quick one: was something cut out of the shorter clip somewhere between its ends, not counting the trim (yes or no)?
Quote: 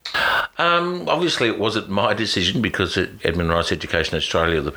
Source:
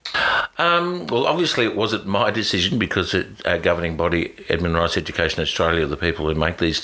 yes